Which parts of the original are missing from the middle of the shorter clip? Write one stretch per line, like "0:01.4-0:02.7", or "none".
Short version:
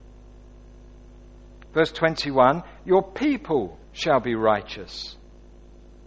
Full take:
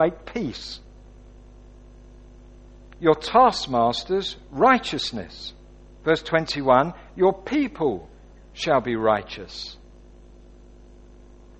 0:03.0-0:06.0
0:08.1-0:08.4

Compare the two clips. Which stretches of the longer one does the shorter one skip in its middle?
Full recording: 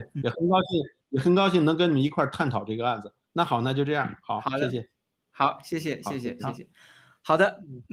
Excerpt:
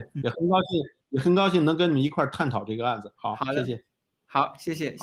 0:03.2-0:04.2

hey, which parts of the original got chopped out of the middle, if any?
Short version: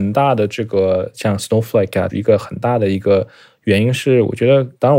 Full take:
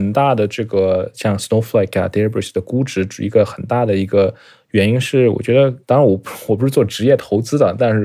0:02.1-0:03.2

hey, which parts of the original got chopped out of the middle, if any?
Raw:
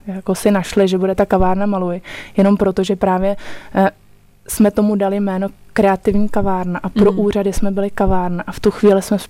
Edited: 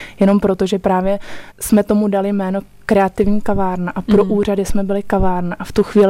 0:03.7-0:04.4

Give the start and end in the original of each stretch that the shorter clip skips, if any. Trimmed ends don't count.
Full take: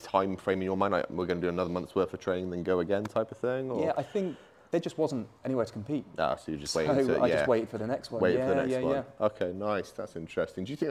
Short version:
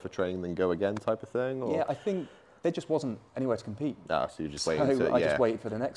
none

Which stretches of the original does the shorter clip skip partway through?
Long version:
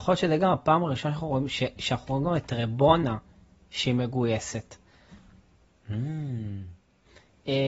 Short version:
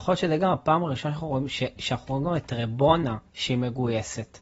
0:03.3-0:03.6

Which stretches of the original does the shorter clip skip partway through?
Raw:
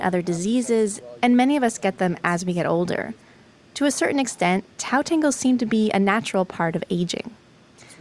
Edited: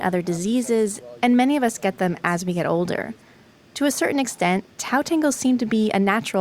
none

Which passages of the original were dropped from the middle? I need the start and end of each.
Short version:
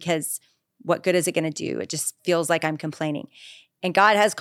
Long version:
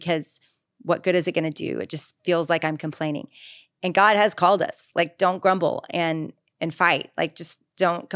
none

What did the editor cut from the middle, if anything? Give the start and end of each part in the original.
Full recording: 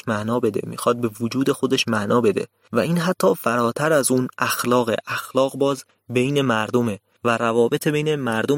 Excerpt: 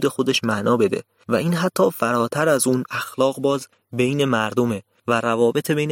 0:04.3-0:05.0

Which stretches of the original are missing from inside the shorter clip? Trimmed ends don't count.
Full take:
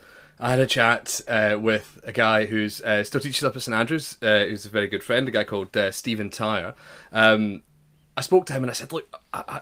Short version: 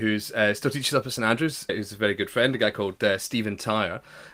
0:04.2-0:04.4

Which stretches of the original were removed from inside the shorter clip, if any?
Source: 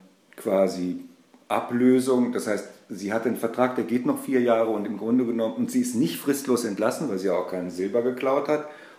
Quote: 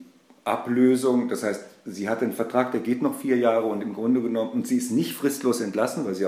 none

